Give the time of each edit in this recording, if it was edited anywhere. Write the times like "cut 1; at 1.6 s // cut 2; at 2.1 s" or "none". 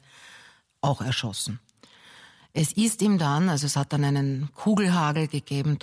none